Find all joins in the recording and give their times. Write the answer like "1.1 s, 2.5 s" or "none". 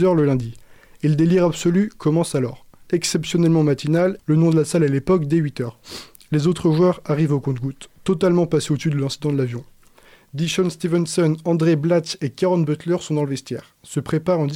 4.2 s